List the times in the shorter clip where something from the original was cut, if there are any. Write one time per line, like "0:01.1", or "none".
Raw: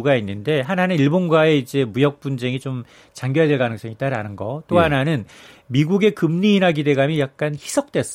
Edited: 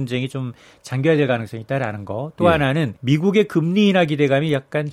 0:03.0